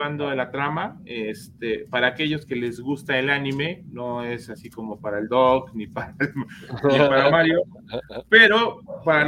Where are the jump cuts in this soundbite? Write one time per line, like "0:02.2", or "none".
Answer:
none